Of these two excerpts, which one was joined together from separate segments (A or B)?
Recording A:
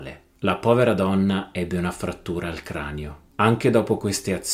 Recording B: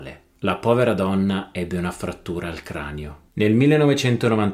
B